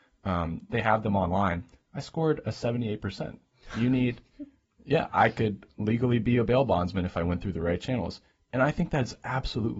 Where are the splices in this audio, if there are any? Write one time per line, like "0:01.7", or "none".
none